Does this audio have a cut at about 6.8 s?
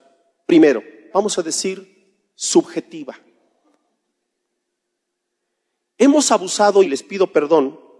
yes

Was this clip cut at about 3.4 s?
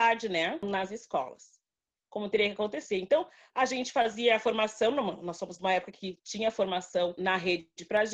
no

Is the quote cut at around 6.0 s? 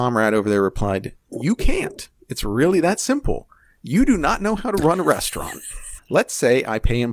yes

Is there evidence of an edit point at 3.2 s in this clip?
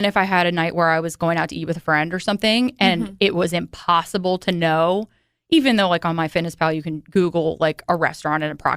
no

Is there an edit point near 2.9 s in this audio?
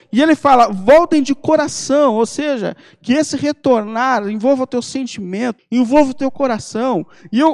no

